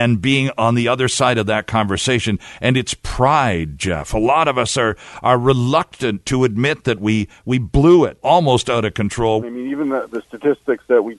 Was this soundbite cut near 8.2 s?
yes; 2 cuts; at 8.2 s, 9.4 s

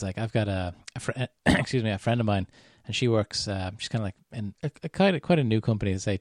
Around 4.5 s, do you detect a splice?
yes; 1 cut; at 4.5 s

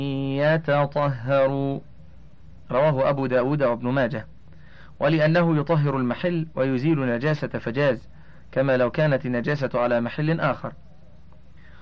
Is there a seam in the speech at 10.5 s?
no; 1 cut; at 2.7 s

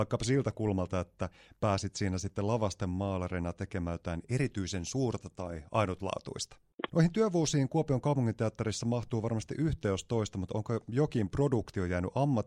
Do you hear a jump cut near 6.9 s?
yes; 1 cut; at 6.9 s

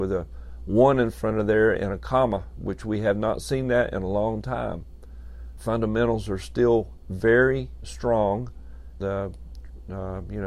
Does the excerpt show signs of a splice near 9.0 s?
yes; 2 cuts; at 5.6 s, 9.0 s

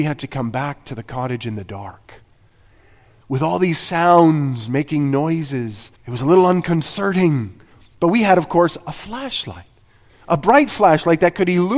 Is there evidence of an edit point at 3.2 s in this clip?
yes; 2 cuts; at 3.2 s, 6.0 s

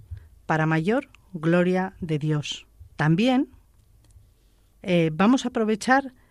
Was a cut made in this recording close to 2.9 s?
yes; 1 cut; at 2.9 s

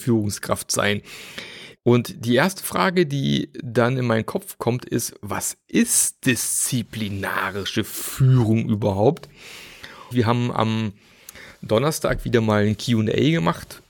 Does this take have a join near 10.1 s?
yes; 2 cuts; at 1.8 s, 10.1 s

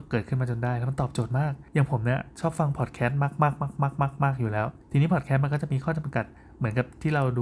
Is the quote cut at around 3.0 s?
no; 2 cuts; at 1.7 s, 4.8 s

